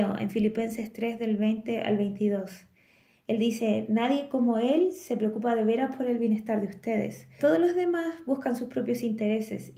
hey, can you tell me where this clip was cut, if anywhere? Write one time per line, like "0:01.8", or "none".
0:07.4